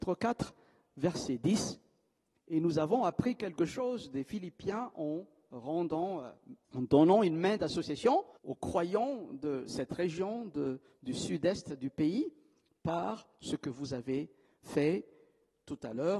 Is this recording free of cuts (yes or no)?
no